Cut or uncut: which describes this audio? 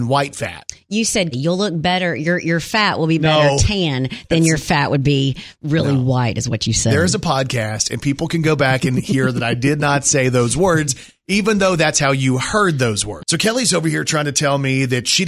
cut